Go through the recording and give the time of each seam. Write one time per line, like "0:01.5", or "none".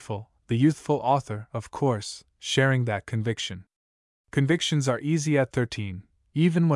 none